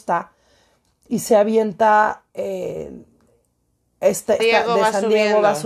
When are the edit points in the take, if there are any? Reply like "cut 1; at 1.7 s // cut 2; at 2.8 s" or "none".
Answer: cut 1; at 2.3 s // cut 2; at 4.4 s